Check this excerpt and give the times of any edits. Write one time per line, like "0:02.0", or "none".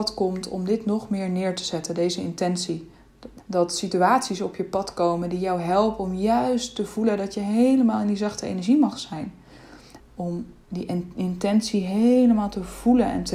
0:03.4
0:10.0